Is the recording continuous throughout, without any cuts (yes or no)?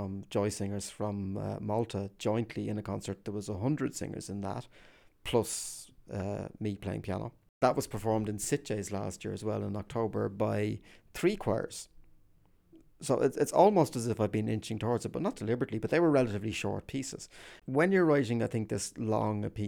yes